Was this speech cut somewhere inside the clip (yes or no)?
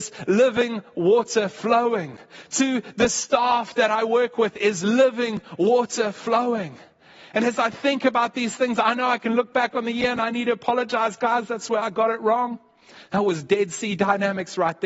no